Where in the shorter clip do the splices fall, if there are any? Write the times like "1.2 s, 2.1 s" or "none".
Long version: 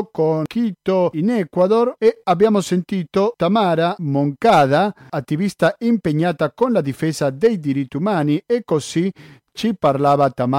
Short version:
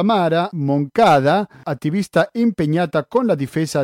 none